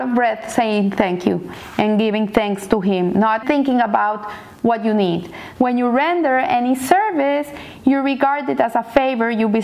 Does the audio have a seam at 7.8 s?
no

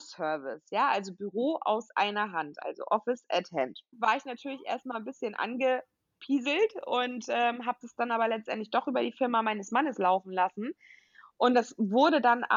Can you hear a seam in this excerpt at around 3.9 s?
yes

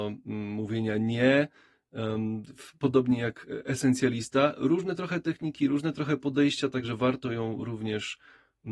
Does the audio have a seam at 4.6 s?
no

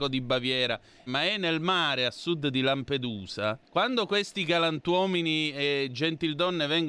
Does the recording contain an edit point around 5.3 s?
no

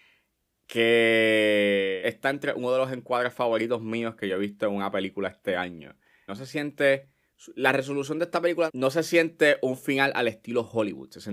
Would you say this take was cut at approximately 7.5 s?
no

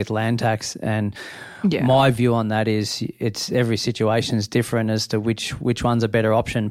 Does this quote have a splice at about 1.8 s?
no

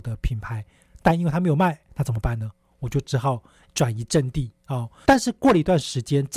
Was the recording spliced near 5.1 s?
yes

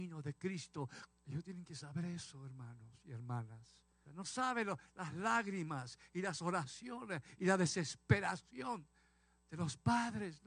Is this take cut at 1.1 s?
yes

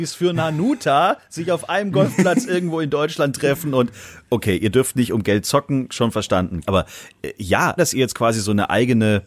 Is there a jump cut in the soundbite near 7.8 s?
yes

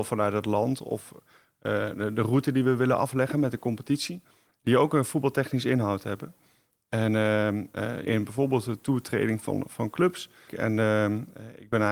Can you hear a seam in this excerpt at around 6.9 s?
no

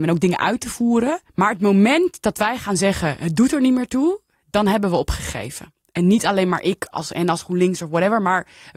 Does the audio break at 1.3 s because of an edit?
yes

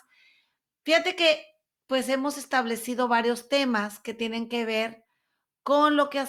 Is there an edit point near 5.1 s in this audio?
no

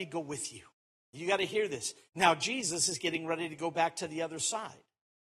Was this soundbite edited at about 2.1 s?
yes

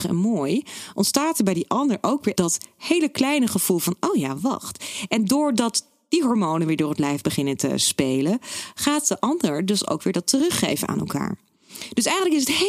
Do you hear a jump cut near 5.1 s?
no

